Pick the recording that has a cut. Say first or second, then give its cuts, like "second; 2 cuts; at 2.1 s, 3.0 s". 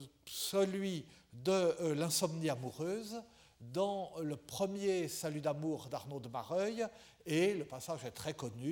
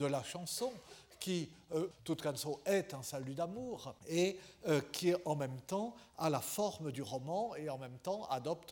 second; 2 cuts; at 1.9 s, 4.0 s